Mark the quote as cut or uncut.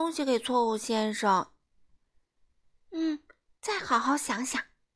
uncut